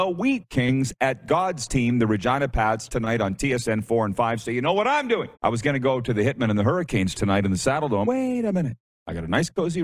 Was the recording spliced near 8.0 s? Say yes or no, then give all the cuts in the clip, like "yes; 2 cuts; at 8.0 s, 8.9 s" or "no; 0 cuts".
yes; 2 cuts; at 5.3 s, 8.0 s